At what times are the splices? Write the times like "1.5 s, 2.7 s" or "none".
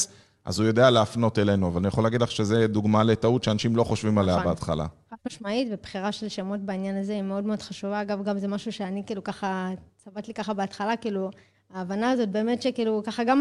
none